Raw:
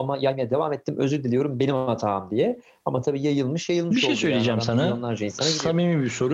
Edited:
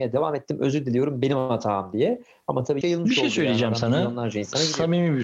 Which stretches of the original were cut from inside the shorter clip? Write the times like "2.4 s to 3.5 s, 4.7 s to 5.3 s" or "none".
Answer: 3.2 s to 3.7 s